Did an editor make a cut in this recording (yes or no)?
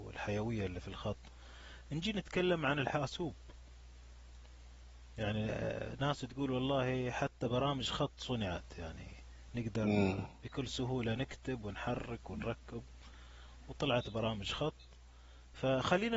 no